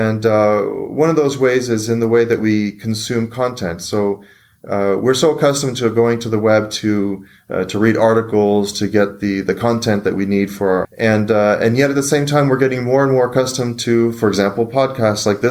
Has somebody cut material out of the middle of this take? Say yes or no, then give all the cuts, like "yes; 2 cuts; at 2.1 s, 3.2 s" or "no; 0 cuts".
yes; 2 cuts; at 8.7 s, 10.8 s